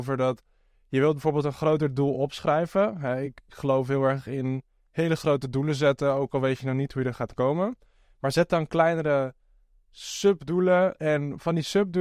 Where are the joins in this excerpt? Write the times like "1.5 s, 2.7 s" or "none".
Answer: none

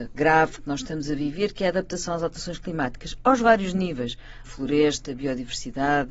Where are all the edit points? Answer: 4.4 s

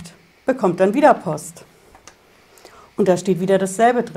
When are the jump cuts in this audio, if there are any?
none

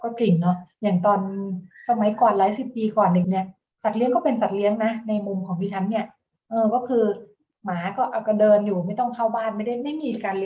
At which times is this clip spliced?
3.2 s

